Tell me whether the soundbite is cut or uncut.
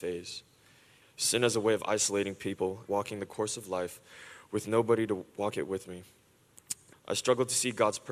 cut